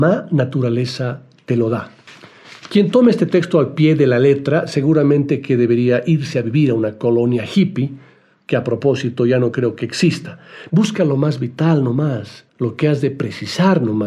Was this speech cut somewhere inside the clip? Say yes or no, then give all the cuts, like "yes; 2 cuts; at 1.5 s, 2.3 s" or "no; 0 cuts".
yes; 2 cuts; at 10.7 s, 12.5 s